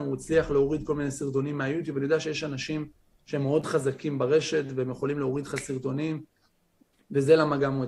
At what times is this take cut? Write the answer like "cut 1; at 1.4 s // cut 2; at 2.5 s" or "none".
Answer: none